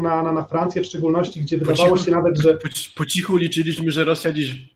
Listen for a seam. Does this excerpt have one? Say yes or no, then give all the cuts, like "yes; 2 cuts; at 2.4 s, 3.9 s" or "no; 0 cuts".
no; 0 cuts